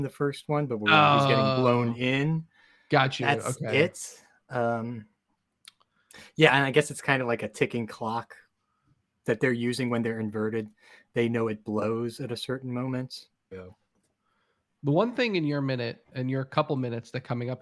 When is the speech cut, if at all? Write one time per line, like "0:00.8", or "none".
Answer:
0:13.5